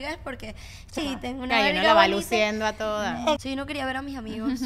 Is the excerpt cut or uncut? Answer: cut